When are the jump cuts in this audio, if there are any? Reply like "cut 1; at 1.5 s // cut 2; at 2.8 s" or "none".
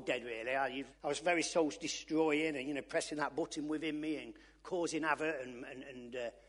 cut 1; at 0.9 s